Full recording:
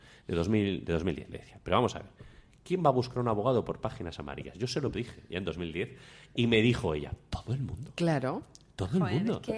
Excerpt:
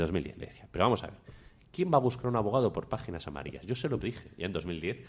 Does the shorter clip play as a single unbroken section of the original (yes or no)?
yes